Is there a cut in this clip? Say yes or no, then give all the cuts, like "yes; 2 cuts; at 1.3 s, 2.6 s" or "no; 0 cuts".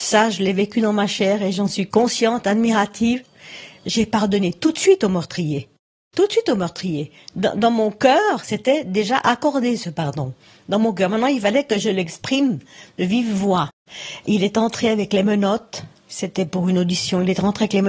no; 0 cuts